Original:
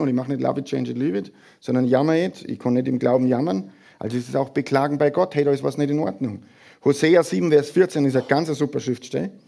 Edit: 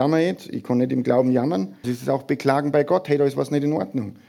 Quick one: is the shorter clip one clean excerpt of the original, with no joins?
no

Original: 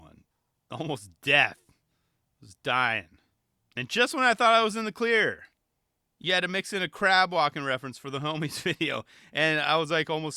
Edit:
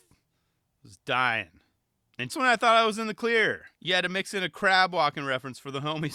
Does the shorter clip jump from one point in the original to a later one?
yes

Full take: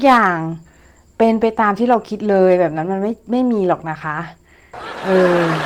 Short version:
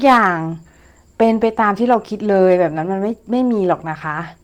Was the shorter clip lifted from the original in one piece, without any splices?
yes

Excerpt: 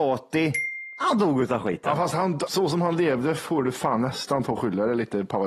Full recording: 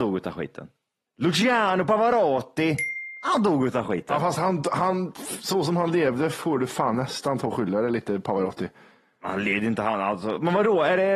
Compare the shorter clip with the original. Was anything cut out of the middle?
yes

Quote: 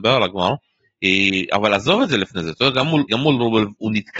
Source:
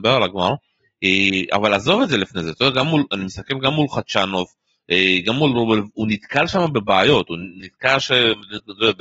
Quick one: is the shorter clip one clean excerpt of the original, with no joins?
no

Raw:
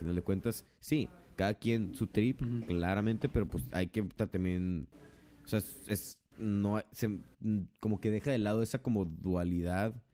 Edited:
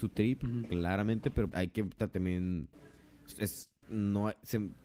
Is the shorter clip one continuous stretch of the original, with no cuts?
no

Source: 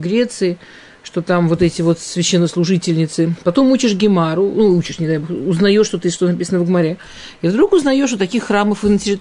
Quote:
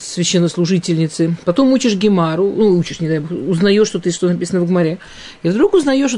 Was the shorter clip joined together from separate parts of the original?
no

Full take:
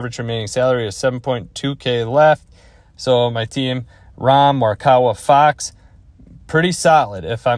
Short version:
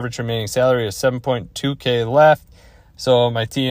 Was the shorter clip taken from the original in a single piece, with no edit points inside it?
yes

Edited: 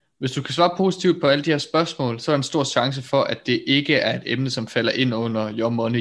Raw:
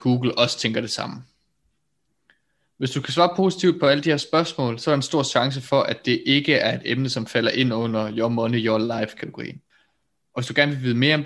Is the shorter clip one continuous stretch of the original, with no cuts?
yes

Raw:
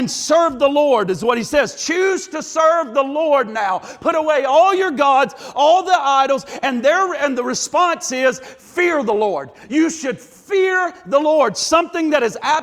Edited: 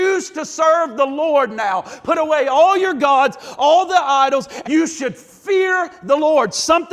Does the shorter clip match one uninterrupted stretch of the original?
no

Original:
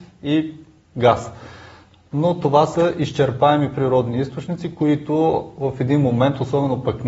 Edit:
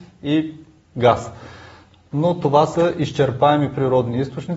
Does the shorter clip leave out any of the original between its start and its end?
no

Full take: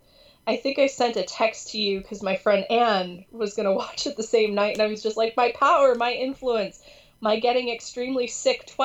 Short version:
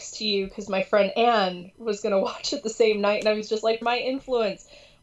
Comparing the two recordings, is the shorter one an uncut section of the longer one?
no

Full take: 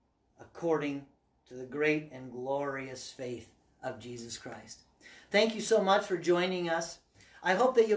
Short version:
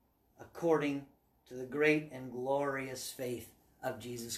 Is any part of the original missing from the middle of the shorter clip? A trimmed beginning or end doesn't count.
no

